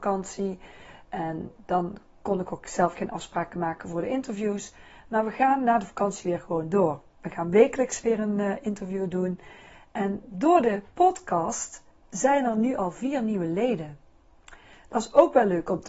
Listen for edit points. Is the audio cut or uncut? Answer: uncut